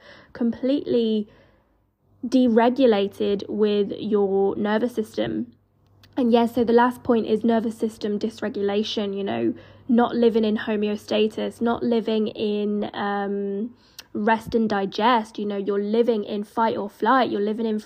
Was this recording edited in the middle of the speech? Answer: no; 0 cuts

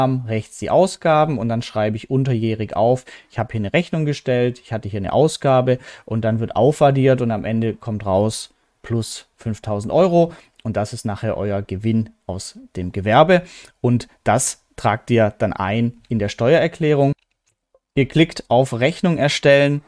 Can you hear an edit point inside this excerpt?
yes; 2 cuts; at 15.5 s, 17.9 s

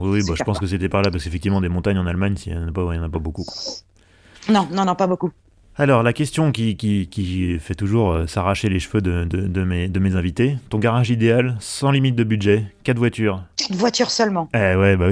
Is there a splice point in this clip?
no; 0 cuts

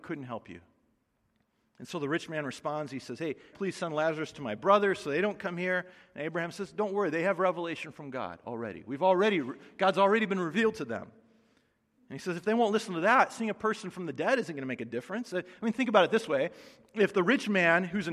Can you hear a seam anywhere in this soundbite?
yes; 1 cut; at 3.5 s

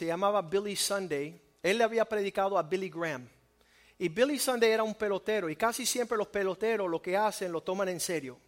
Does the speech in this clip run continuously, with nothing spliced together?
yes; 0 cuts

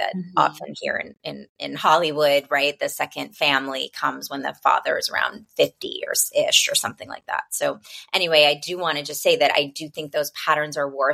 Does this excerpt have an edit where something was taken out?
no; 0 cuts

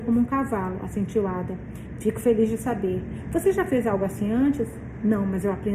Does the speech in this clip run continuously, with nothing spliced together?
yes; 0 cuts

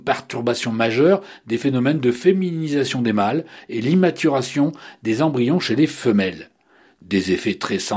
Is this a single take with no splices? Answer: yes; 0 cuts

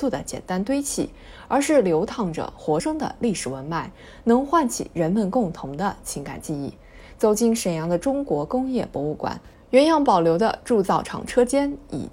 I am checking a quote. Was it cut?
yes; 1 cut; at 2.8 s

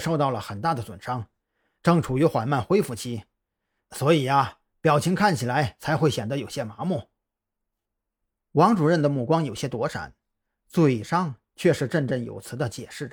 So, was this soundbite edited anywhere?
no; 0 cuts

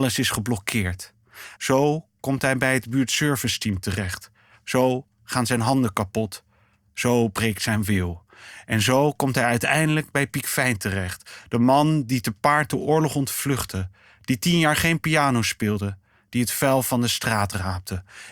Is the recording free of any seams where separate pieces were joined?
no; 1 cut; at 1.6 s

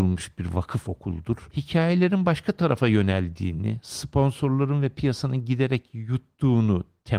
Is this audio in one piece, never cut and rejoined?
yes; 0 cuts

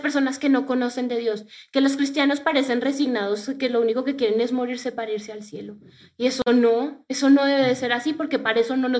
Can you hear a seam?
no; 0 cuts

